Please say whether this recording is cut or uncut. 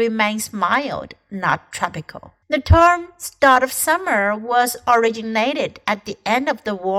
cut